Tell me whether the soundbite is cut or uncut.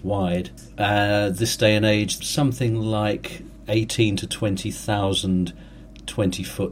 cut